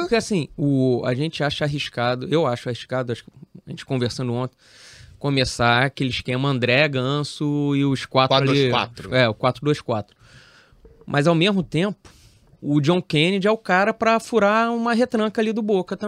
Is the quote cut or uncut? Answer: uncut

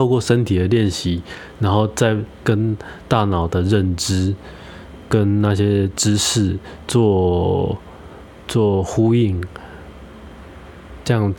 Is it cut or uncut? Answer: uncut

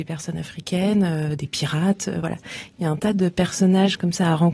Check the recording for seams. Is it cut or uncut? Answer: uncut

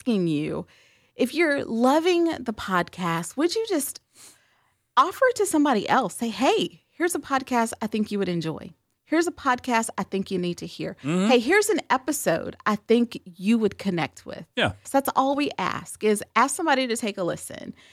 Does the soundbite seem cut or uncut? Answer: cut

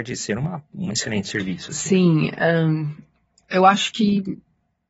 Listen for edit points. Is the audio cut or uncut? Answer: uncut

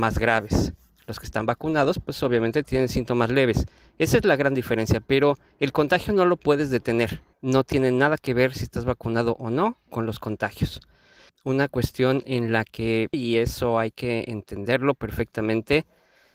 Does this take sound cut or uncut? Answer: cut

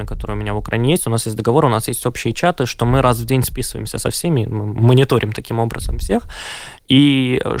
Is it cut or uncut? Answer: uncut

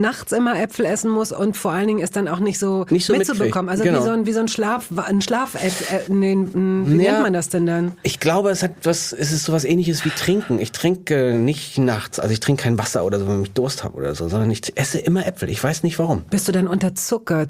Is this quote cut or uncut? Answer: uncut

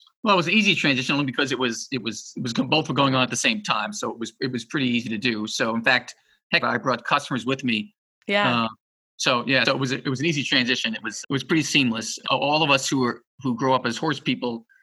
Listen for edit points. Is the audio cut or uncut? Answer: cut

